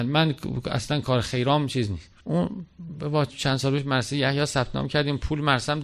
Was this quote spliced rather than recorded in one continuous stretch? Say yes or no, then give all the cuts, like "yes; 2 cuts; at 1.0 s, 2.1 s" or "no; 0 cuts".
yes; 1 cut; at 2.2 s